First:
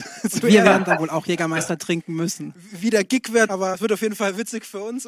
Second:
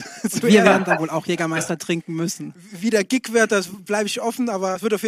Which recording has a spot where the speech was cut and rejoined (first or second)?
first